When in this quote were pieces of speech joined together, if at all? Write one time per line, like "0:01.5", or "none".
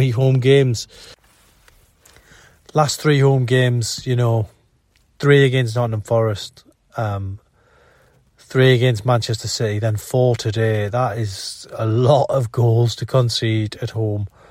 none